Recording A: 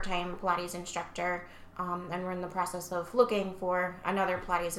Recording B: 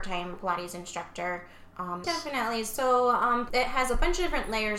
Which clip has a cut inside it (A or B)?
B